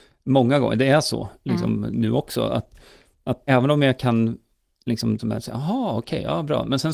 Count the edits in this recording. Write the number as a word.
two